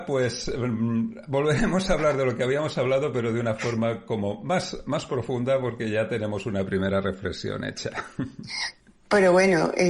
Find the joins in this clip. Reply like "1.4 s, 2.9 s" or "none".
none